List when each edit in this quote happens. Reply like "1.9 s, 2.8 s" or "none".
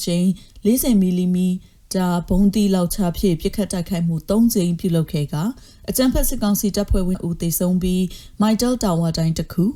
7.1 s